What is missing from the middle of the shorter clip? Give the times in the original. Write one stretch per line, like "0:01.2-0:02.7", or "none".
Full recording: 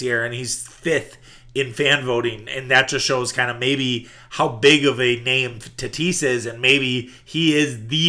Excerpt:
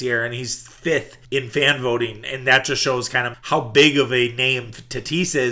0:01.2-0:01.5
0:03.6-0:04.2